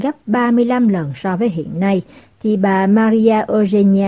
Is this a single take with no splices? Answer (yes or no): yes